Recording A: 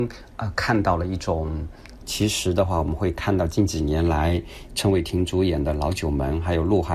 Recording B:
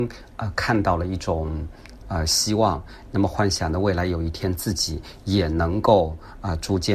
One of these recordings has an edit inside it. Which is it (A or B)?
A